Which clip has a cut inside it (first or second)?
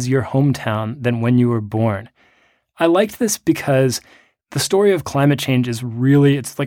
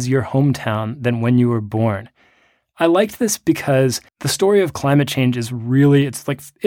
second